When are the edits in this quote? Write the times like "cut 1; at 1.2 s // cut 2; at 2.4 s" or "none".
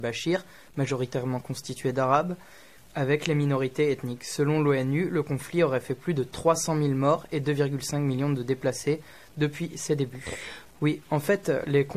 cut 1; at 10.6 s

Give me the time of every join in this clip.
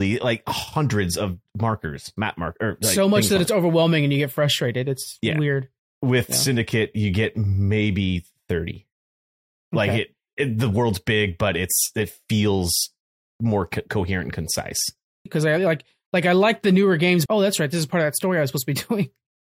cut 1; at 15.3 s // cut 2; at 17.3 s

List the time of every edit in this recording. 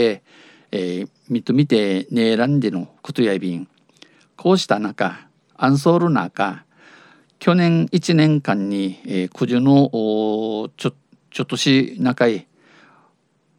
none

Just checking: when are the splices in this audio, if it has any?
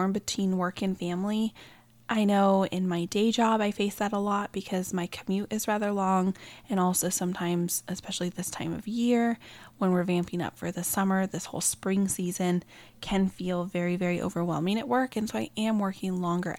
none

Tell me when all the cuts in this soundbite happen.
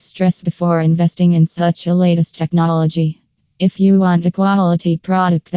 none

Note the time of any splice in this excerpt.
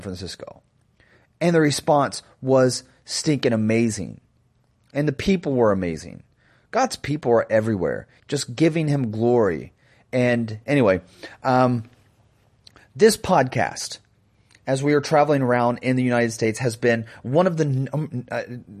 cut 1; at 8.2 s

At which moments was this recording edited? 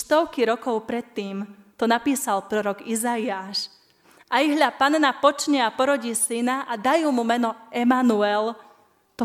none

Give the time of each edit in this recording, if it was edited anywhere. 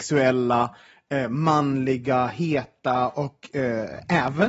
none

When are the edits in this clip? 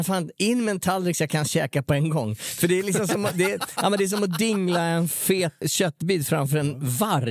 cut 1; at 5.6 s

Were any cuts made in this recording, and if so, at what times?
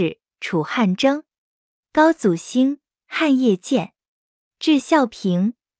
none

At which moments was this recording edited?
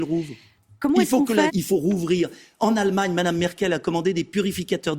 cut 1; at 1.5 s

